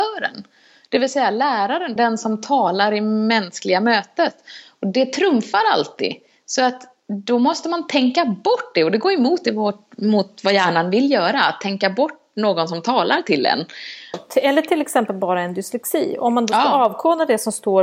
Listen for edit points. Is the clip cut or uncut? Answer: cut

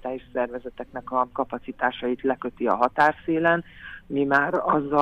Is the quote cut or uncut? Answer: uncut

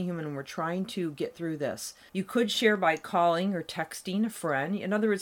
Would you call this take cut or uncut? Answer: cut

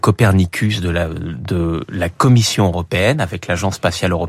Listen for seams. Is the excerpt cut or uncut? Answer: uncut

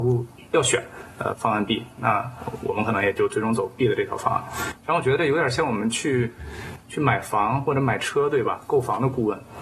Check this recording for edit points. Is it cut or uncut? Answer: uncut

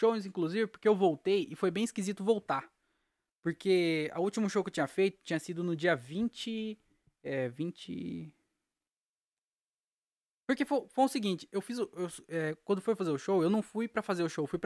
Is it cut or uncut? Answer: cut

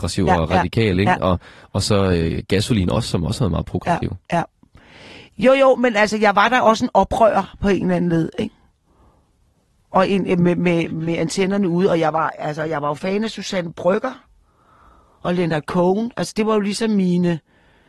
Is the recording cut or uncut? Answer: uncut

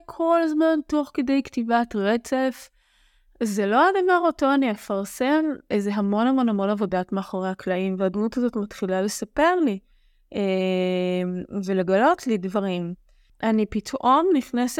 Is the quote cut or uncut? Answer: cut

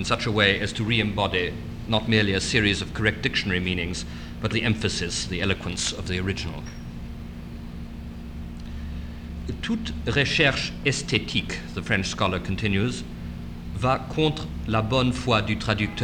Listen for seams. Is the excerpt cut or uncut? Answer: cut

